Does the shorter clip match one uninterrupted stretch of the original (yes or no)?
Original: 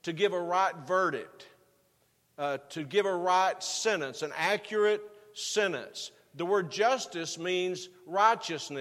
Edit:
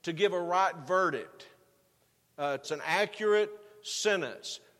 no